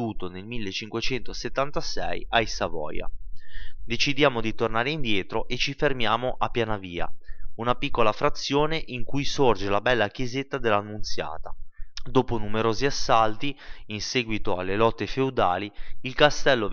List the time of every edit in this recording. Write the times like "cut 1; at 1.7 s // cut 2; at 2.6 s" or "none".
cut 1; at 3.8 s // cut 2; at 12.0 s